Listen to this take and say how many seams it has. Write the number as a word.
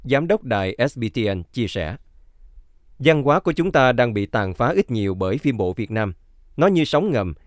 zero